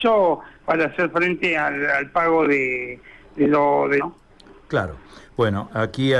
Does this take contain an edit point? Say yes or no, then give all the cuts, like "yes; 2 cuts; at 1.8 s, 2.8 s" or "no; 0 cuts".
yes; 1 cut; at 4.0 s